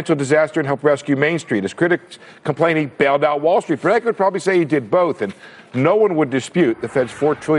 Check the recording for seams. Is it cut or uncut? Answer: uncut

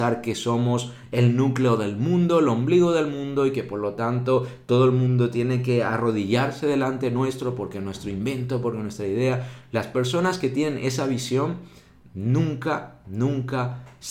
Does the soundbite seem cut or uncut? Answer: uncut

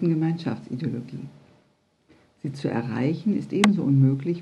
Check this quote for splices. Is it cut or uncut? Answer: uncut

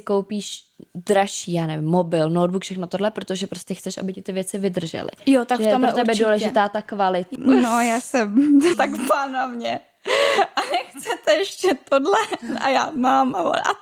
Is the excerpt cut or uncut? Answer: cut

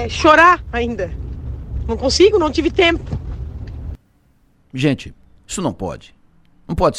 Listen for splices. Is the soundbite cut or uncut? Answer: uncut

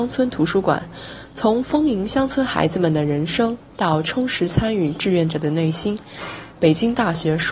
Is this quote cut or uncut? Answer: cut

